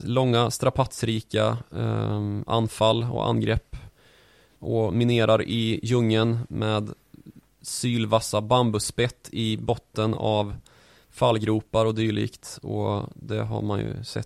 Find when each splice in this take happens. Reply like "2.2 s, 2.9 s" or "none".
none